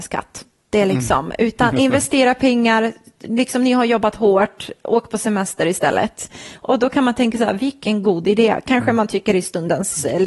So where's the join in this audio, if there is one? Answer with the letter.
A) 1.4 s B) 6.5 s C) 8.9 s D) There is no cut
D